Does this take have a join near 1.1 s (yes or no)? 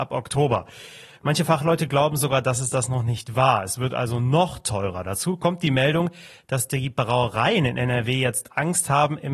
no